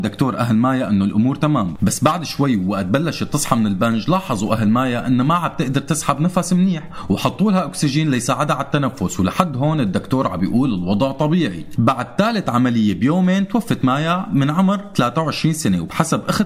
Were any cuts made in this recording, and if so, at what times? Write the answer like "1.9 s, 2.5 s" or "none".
11.8 s